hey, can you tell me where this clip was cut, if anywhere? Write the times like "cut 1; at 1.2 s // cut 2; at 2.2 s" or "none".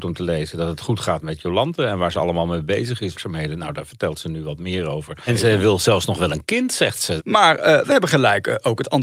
cut 1; at 3.1 s // cut 2; at 5.3 s // cut 3; at 7.2 s

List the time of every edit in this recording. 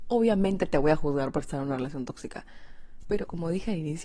none

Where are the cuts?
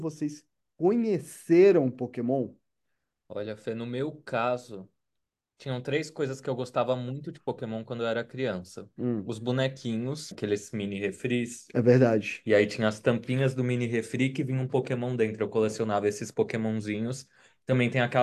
cut 1; at 10.3 s

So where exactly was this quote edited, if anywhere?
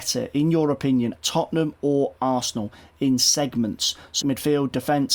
cut 1; at 1.2 s // cut 2; at 4.2 s

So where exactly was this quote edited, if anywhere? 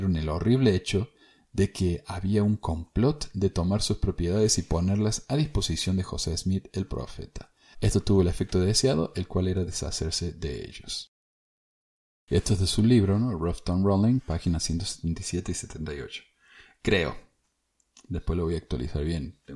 cut 1; at 7.7 s

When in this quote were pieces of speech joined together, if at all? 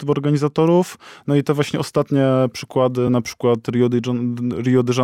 none

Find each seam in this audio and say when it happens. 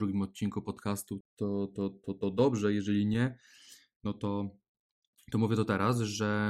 cut 1; at 1.2 s

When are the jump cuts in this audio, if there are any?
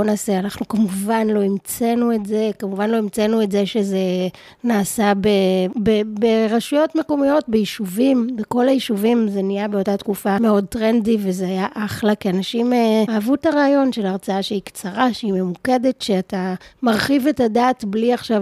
none

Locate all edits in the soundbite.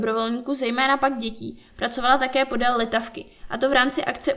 none

